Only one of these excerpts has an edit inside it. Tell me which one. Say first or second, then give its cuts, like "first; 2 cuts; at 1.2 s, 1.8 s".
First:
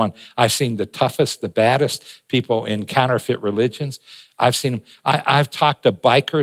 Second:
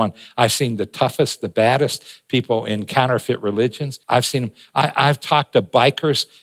second; 1 cut; at 4.0 s